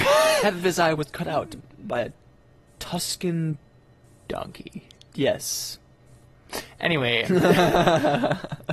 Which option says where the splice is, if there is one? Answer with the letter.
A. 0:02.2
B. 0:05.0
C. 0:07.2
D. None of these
C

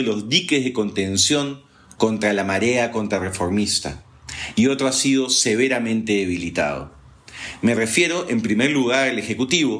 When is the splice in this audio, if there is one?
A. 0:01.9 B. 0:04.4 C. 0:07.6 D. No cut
D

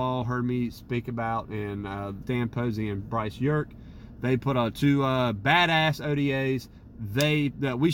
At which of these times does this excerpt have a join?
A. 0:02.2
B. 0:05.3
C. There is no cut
A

